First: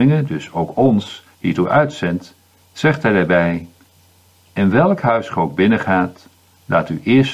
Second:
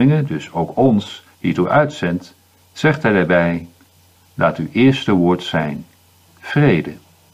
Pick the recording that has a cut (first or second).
second